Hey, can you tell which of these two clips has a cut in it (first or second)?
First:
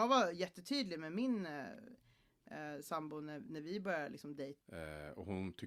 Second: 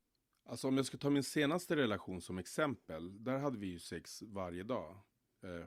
first